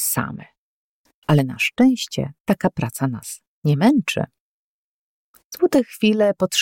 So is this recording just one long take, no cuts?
no; 1 cut; at 1.2 s

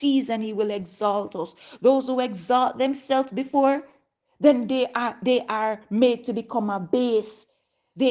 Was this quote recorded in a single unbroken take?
yes; 0 cuts

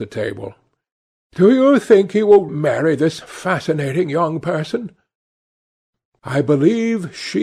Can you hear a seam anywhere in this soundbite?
yes; 1 cut; at 2.5 s

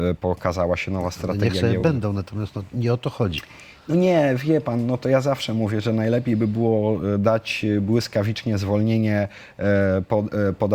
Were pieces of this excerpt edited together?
no; 0 cuts

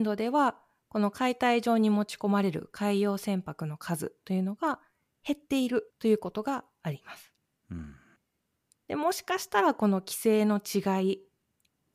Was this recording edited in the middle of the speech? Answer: yes; 1 cut; at 5.9 s

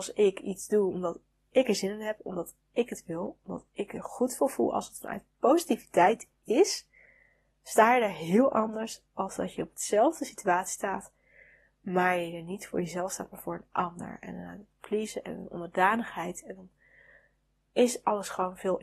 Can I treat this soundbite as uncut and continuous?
yes; 0 cuts

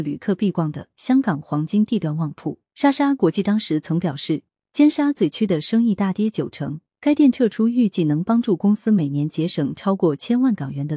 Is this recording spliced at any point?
yes; 1 cut; at 2.7 s

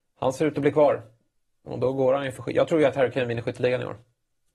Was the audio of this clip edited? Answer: no; 0 cuts

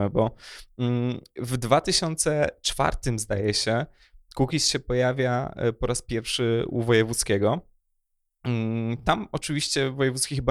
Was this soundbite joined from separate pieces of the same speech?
no; 0 cuts

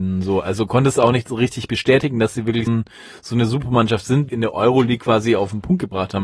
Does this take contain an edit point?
yes; 2 cuts; at 2.7 s, 4.3 s

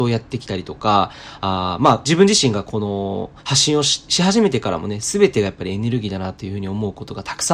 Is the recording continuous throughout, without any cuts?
no; 1 cut; at 3.4 s

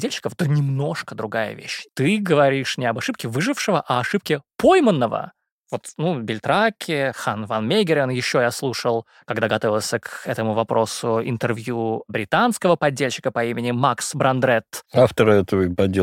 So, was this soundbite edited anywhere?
yes; 1 cut; at 1.9 s

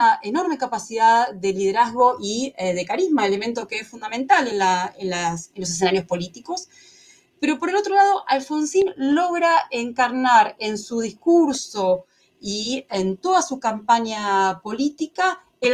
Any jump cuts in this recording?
no; 0 cuts

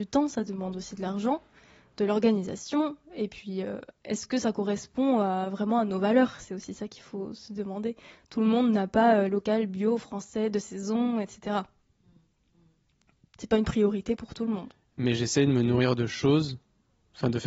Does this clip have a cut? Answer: yes; 1 cut; at 9.3 s

